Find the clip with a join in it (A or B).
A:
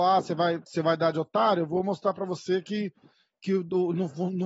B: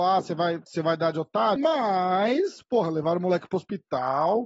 B